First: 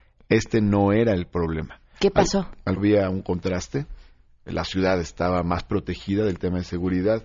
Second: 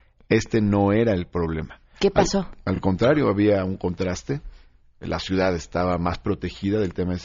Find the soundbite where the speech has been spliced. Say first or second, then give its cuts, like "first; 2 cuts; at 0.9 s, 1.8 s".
first; 1 cut; at 2.8 s